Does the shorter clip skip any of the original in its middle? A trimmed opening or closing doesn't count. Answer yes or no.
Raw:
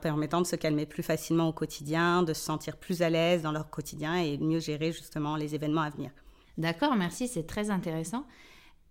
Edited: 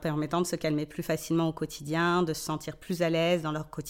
no